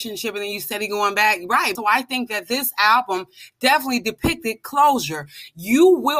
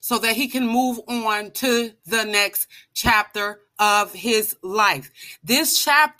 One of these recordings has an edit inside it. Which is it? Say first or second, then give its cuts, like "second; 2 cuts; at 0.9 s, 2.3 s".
first; 1 cut; at 1.8 s